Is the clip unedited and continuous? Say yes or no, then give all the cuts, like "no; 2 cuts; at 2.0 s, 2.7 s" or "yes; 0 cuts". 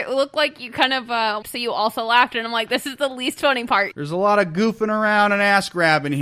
no; 2 cuts; at 1.4 s, 3.9 s